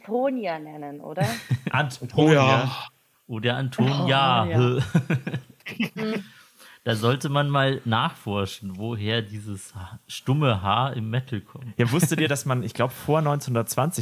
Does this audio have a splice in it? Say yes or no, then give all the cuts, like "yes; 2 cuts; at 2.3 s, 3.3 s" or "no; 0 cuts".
no; 0 cuts